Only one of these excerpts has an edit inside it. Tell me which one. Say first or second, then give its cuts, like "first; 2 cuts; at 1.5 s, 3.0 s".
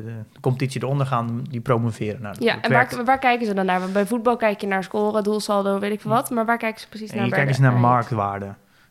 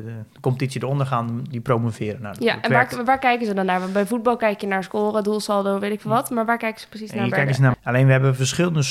second; 1 cut; at 7.7 s